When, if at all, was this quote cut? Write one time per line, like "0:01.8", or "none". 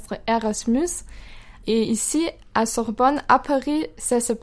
0:01.6